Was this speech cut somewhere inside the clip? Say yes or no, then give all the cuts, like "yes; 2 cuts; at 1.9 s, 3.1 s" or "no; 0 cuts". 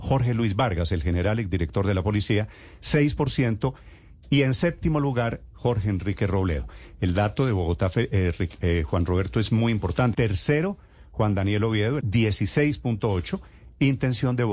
yes; 2 cuts; at 10.1 s, 12.0 s